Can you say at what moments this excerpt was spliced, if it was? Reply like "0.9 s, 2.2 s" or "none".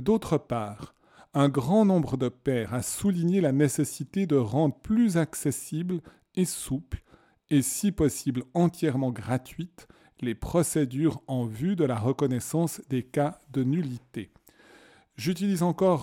none